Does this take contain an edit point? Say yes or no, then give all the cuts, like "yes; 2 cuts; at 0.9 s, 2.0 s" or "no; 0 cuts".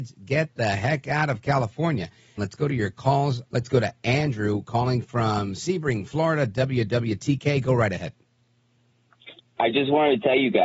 yes; 3 cuts; at 2.4 s, 3.5 s, 9.6 s